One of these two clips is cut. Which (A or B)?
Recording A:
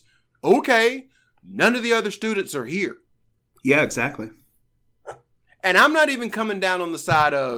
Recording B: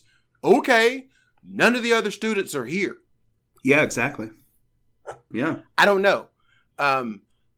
B